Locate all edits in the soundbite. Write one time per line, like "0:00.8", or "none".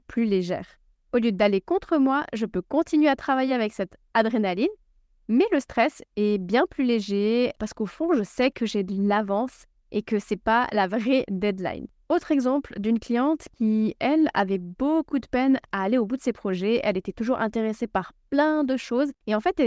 none